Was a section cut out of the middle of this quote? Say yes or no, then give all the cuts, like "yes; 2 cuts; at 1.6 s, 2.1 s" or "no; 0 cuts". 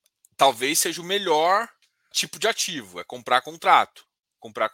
yes; 1 cut; at 2.1 s